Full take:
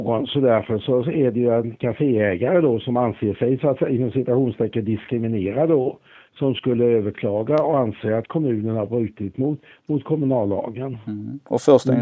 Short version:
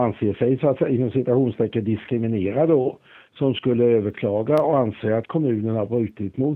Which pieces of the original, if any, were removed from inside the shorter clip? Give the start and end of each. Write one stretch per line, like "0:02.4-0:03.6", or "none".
none